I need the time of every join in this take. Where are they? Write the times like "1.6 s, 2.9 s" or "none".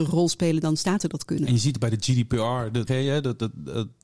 2.9 s